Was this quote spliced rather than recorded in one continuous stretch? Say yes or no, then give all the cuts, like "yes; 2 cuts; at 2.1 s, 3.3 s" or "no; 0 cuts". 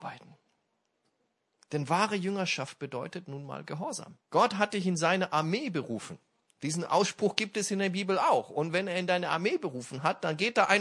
yes; 1 cut; at 4.2 s